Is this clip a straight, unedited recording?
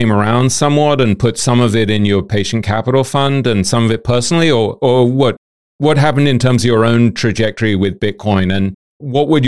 yes; 0 cuts

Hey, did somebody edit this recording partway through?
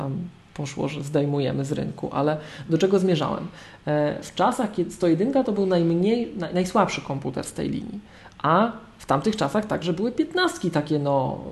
no; 0 cuts

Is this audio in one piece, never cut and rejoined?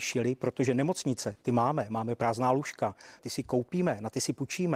no; 1 cut; at 3.2 s

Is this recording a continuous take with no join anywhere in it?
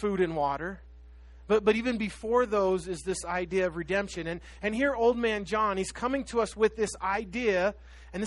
yes; 0 cuts

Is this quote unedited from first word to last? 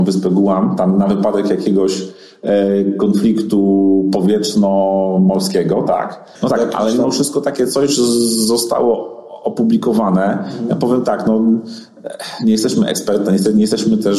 no; 1 cut; at 6.4 s

